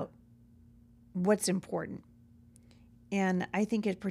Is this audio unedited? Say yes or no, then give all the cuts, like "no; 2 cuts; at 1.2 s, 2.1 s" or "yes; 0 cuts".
yes; 0 cuts